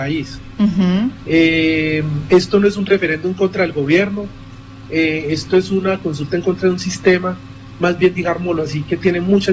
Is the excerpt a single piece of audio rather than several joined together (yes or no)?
no